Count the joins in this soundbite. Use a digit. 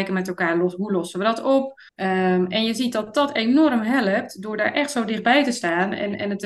1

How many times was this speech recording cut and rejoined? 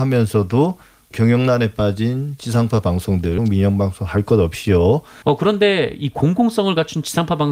2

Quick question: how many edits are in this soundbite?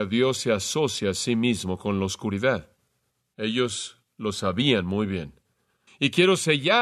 1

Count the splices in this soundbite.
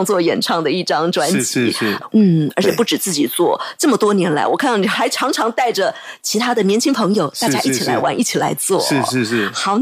1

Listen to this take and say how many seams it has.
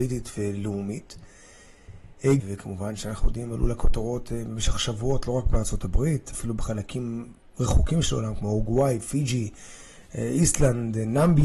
1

